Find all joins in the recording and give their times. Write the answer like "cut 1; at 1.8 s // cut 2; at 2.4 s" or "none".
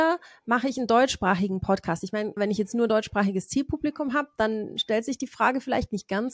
cut 1; at 2.4 s

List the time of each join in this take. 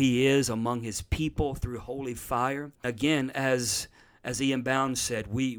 cut 1; at 2.8 s

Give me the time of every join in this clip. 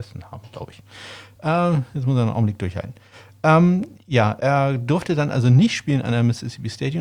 cut 1; at 4.4 s

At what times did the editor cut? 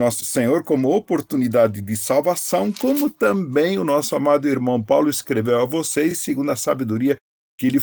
none

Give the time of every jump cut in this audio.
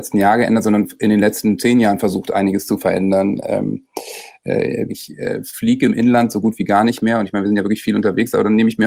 cut 1; at 4.9 s

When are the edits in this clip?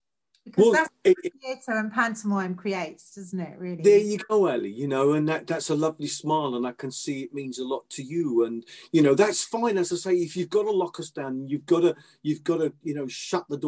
none

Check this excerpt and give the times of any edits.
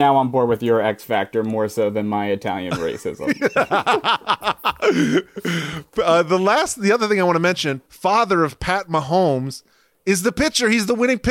cut 1; at 7.9 s

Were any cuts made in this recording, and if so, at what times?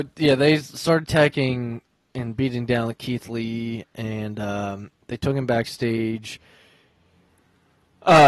none

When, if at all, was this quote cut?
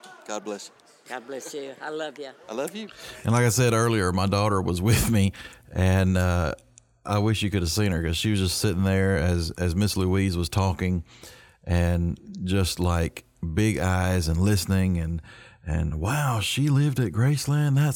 none

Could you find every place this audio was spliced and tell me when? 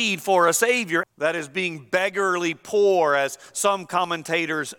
cut 1; at 1.0 s

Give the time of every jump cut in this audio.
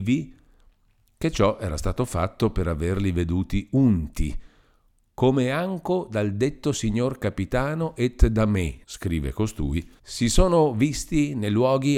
cut 1; at 8.8 s // cut 2; at 10.0 s

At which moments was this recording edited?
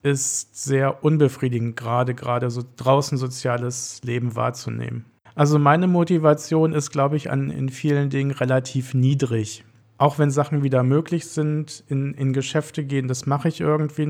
cut 1; at 5.3 s // cut 2; at 7.5 s

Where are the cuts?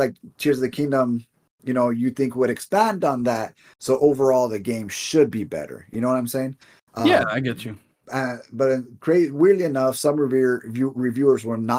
none

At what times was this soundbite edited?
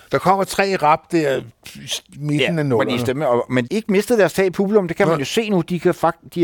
cut 1; at 3.7 s

